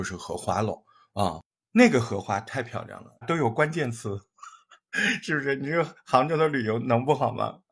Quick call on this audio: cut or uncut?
cut